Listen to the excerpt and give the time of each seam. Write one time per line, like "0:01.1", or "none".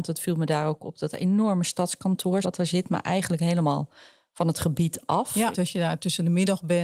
0:02.4
0:05.5